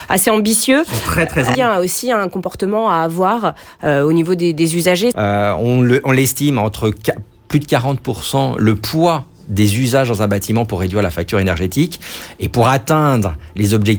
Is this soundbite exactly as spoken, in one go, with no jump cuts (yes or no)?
no